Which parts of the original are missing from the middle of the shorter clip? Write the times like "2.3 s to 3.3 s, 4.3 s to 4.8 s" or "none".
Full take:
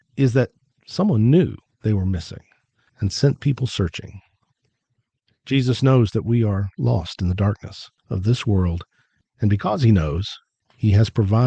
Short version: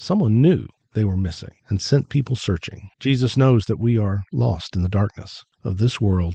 2.5 s to 2.9 s, 4.2 s to 5.4 s